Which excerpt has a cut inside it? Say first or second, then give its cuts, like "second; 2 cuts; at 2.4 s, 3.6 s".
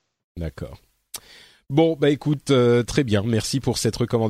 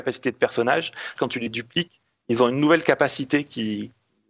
second; 1 cut; at 1.2 s